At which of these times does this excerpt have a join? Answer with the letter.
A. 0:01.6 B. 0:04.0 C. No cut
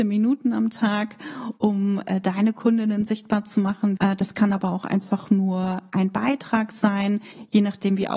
B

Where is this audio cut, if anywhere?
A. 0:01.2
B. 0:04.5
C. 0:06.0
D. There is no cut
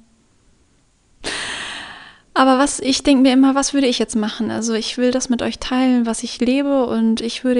A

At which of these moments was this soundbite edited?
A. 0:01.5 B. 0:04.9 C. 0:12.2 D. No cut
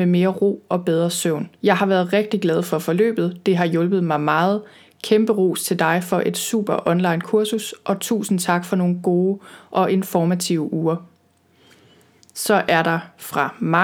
A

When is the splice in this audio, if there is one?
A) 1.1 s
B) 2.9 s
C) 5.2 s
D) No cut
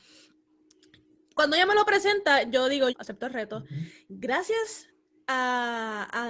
B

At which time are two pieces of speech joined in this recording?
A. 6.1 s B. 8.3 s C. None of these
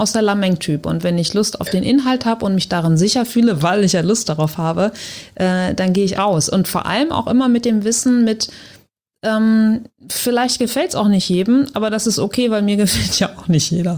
A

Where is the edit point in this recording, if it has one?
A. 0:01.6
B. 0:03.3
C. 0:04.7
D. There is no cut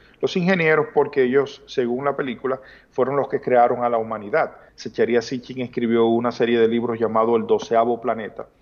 C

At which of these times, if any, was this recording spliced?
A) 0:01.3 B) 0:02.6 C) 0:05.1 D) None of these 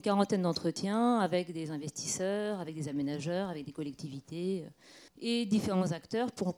C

